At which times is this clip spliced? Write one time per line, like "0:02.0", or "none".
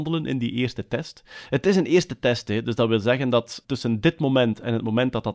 0:03.6